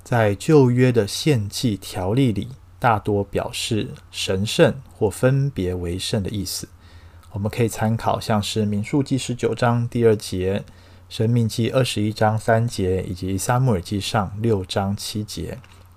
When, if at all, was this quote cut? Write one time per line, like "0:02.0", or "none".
none